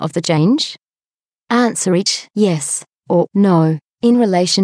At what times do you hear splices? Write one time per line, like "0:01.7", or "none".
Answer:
0:01.4